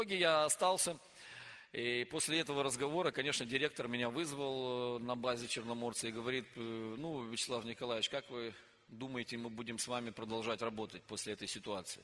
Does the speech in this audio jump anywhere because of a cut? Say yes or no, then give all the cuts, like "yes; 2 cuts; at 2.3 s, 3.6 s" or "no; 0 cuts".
no; 0 cuts